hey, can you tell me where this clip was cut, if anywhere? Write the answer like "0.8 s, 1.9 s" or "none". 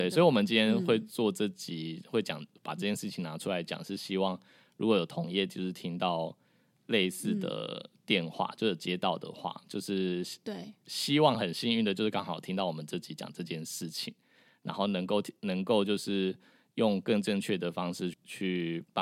18.1 s